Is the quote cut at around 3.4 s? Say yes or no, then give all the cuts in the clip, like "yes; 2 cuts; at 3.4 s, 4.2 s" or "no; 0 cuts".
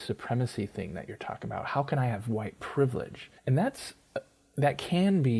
yes; 1 cut; at 3.4 s